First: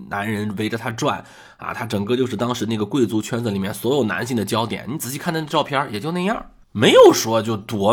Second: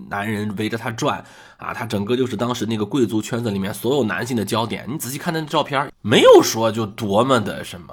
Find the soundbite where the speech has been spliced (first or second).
second